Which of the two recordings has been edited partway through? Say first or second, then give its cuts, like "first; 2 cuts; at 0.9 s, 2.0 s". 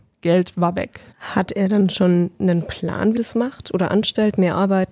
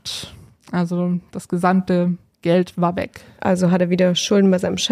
first; 2 cuts; at 1.1 s, 3.2 s